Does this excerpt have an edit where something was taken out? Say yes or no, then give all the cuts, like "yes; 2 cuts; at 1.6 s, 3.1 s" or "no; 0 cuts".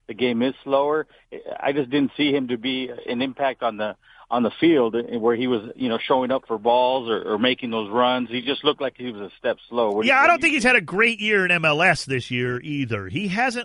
no; 0 cuts